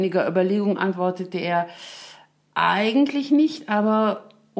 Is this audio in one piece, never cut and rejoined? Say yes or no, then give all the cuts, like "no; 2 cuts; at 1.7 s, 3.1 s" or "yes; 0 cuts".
yes; 0 cuts